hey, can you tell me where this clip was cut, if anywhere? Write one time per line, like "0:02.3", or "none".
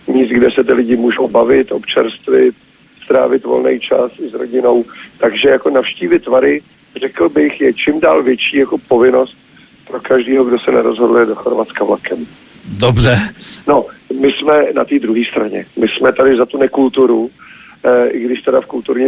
0:13.6